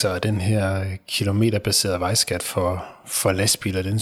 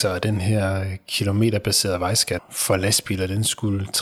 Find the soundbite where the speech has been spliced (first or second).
second